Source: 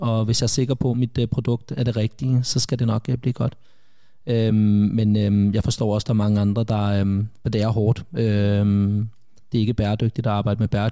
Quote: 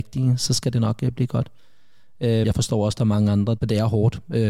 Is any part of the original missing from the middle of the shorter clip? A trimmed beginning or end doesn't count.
yes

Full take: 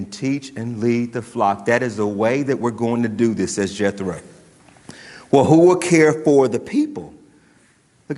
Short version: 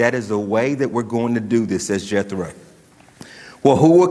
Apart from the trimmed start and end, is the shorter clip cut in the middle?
no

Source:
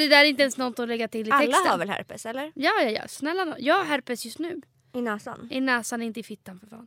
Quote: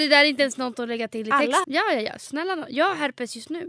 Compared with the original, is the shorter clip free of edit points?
no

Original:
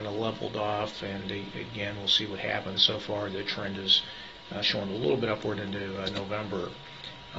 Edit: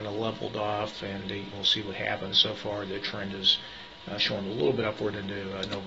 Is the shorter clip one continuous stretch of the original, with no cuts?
no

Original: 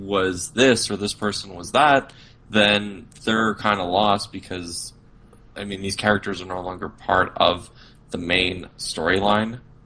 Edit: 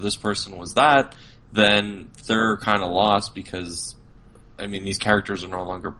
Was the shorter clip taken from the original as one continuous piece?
yes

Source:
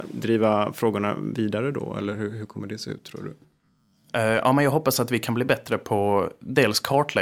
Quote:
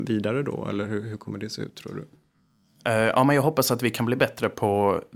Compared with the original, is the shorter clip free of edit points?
yes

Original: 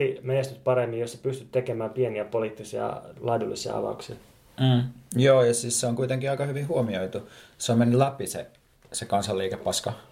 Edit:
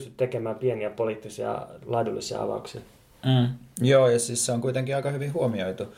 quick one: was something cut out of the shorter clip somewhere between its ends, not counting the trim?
no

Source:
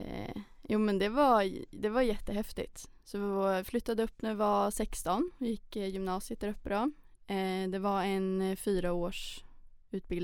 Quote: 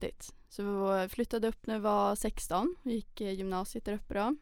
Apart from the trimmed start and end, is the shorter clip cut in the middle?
no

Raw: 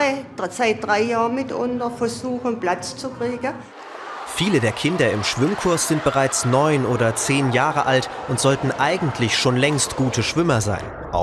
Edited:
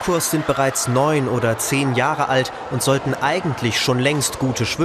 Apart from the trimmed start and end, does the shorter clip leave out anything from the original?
no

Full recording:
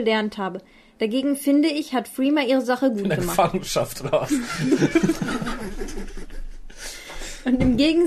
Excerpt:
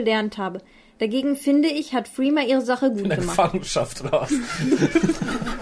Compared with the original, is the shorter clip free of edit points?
yes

